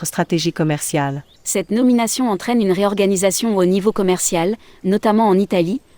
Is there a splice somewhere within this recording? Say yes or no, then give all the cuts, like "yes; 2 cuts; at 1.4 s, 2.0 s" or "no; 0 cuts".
yes; 1 cut; at 1.4 s